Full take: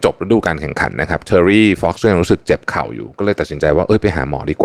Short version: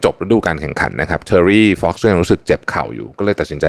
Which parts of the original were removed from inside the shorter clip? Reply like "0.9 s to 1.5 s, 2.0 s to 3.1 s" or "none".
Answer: none